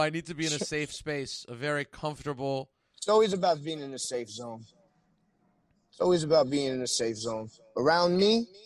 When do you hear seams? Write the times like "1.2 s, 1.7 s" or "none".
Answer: none